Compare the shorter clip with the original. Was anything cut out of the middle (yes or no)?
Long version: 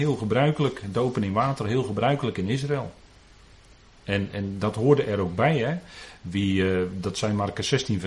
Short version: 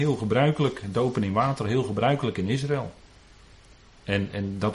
no